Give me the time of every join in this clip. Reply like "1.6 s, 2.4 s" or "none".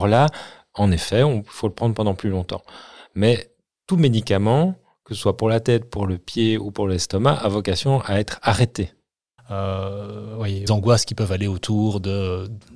9.4 s, 10.7 s